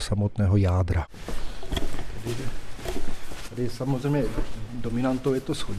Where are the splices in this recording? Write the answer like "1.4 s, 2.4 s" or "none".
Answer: none